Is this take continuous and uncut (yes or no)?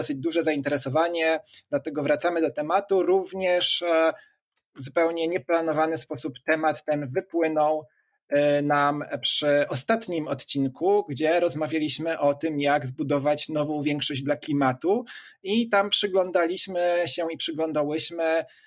yes